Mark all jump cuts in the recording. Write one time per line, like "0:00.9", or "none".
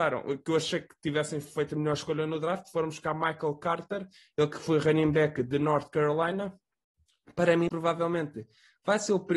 0:07.7